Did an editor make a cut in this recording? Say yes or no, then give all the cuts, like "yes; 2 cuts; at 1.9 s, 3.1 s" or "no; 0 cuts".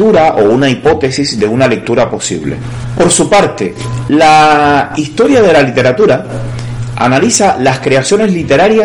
no; 0 cuts